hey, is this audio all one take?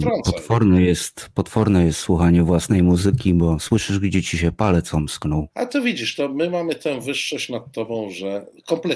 no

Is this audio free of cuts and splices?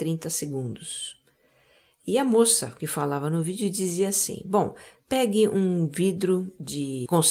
yes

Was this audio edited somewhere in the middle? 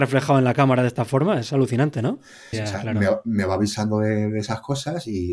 yes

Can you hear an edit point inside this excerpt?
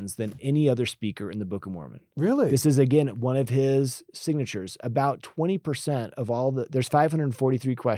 no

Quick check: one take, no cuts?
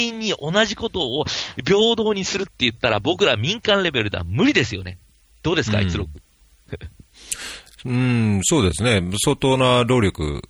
yes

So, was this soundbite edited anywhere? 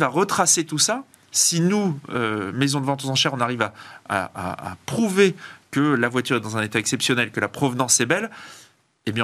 no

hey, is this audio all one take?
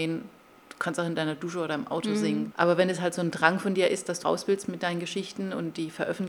no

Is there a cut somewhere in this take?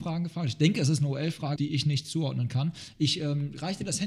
yes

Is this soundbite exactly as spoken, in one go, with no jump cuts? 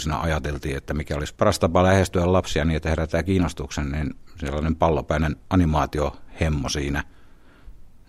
no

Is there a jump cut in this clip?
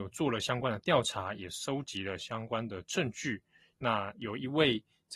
yes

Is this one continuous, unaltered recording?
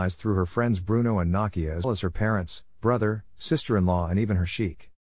no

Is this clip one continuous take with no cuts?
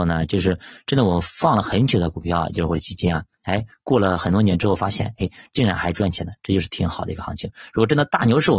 yes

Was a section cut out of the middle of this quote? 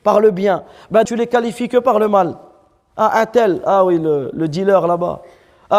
yes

